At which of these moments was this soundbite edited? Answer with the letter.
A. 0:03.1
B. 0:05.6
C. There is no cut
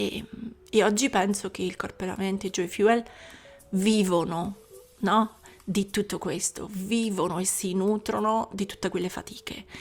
C